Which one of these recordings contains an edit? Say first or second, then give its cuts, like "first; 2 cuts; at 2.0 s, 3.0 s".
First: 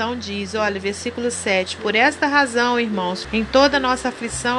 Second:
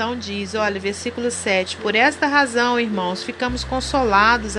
first; 1 cut; at 3.2 s